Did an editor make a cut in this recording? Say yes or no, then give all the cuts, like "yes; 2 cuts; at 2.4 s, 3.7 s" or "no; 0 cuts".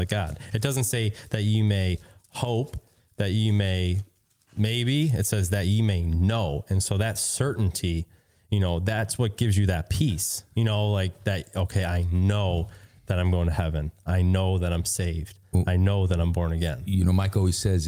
no; 0 cuts